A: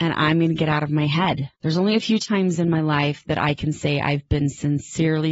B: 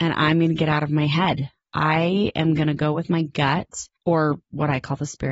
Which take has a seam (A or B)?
A